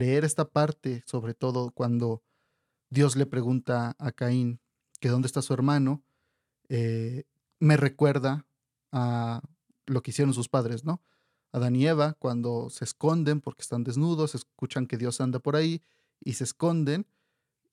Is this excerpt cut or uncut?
uncut